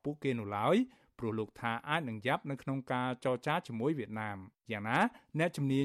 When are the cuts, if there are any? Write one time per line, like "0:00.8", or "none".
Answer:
0:04.6

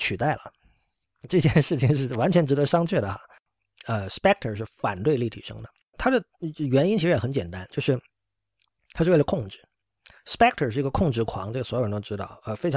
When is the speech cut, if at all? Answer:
0:01.3

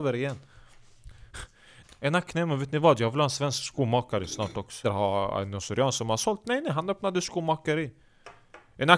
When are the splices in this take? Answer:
0:01.8
0:04.8

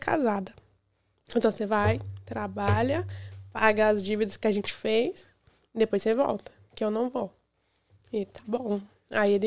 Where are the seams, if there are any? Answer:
0:01.2

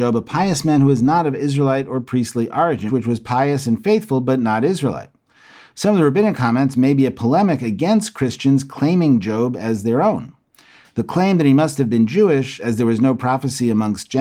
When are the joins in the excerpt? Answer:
0:02.9

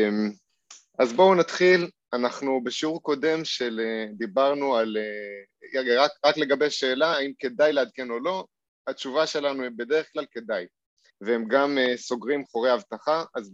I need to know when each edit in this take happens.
0:11.1
0:12.4

